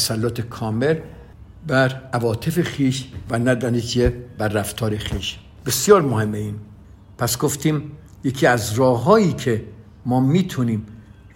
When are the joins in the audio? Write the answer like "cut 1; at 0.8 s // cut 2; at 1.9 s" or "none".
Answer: none